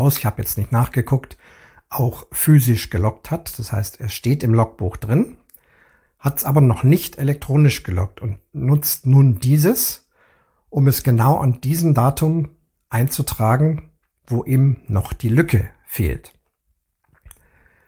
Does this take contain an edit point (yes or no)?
no